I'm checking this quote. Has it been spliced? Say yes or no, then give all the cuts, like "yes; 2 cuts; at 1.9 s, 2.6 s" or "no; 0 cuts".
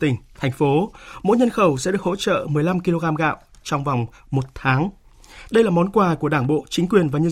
yes; 1 cut; at 5.5 s